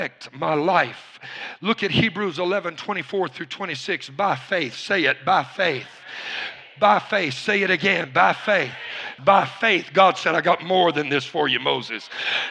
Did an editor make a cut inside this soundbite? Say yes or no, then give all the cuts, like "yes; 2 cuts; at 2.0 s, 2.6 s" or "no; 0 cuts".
yes; 1 cut; at 9.2 s